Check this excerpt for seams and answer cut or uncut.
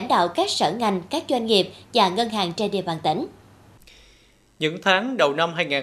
uncut